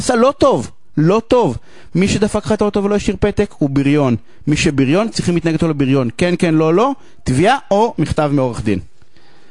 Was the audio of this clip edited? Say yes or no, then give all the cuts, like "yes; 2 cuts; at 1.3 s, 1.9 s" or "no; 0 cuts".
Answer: no; 0 cuts